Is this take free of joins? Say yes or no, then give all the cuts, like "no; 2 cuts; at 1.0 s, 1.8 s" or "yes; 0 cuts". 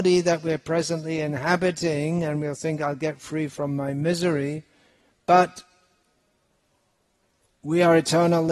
yes; 0 cuts